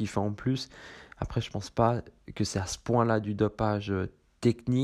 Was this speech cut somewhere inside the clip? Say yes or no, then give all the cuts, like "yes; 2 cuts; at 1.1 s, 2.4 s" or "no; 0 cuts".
no; 0 cuts